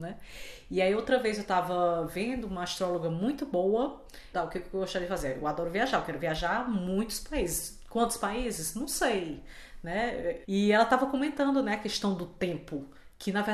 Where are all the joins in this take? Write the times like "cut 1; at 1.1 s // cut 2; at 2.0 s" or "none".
cut 1; at 4.3 s // cut 2; at 10.4 s